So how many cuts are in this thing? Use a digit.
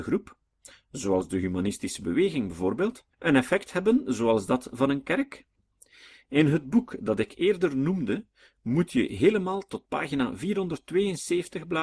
1